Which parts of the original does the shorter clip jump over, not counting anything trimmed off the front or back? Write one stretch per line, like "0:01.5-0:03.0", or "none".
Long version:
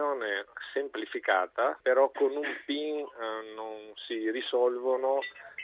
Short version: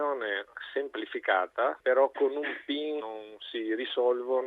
0:03.0-0:03.6